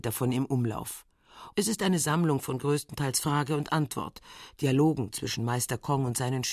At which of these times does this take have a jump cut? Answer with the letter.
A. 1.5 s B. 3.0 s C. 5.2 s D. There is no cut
A